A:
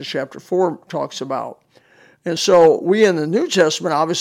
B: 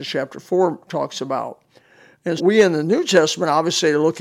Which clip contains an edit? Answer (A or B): B